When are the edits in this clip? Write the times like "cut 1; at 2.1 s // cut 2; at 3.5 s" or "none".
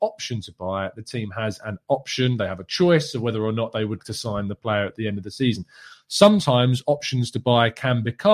cut 1; at 4.0 s